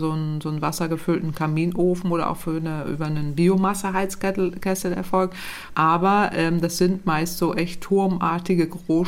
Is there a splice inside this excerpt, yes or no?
yes